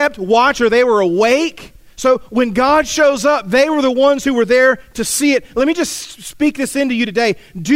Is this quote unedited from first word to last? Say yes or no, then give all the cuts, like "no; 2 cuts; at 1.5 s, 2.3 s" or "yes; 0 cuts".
yes; 0 cuts